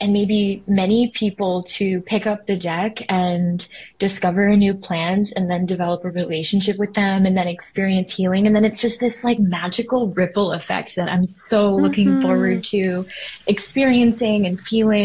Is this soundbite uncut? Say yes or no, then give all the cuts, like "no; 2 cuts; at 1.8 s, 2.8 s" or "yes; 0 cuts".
yes; 0 cuts